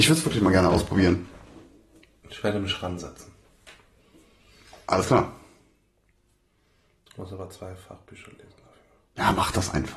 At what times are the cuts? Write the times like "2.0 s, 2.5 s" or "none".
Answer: none